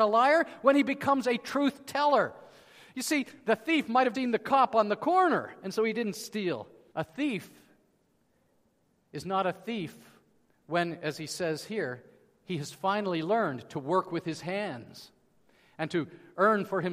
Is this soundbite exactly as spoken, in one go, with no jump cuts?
no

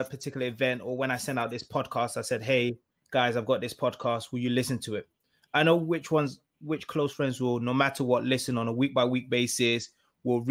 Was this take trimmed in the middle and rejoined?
no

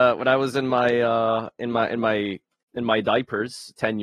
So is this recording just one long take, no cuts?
yes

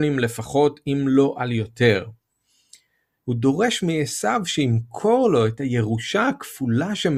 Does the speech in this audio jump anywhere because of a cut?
yes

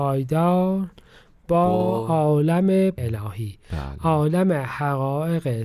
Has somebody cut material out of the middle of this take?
yes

